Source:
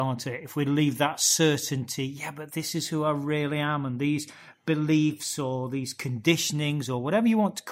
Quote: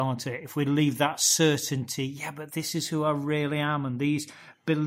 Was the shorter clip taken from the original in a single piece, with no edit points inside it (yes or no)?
yes